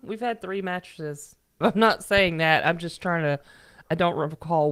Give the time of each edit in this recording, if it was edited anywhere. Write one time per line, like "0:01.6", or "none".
0:01.6